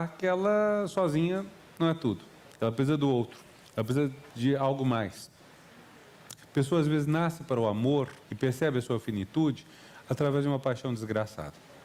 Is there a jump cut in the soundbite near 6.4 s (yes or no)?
yes